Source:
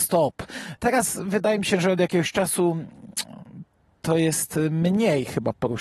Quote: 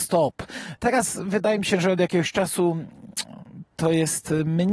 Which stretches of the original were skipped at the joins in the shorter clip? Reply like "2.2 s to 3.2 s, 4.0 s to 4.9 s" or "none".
3.7 s to 4.0 s